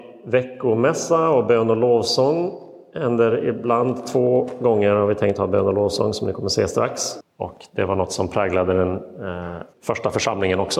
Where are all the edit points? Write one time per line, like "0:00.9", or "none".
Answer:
0:07.2
0:09.7

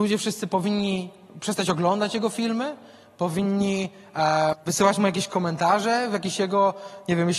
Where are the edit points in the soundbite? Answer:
0:04.5

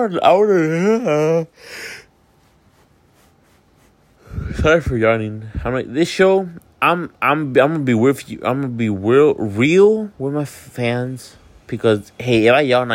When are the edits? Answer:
none

